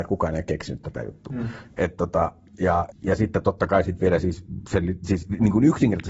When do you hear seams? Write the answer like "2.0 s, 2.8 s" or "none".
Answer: 2.9 s